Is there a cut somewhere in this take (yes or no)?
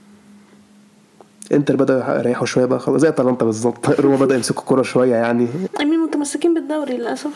yes